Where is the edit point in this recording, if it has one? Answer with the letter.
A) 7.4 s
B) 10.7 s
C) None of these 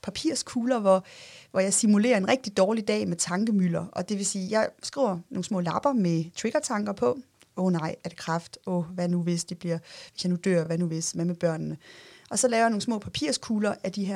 C